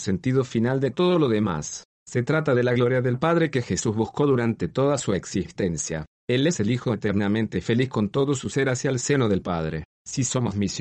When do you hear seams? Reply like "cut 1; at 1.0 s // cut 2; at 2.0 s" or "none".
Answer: none